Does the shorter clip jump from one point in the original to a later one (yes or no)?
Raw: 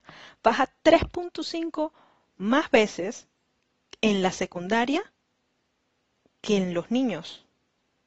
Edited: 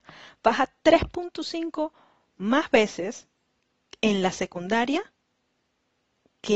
no